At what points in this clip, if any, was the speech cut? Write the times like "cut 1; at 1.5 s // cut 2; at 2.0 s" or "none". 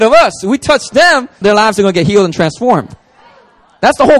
cut 1; at 1.4 s